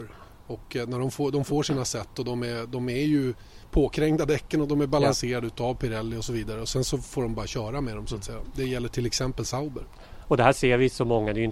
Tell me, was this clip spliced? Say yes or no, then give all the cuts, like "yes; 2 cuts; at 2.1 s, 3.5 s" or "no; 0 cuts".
no; 0 cuts